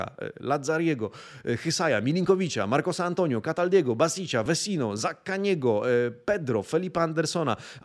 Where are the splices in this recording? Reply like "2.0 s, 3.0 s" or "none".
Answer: none